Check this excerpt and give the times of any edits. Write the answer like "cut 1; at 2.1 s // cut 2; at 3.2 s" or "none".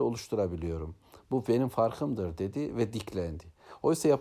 none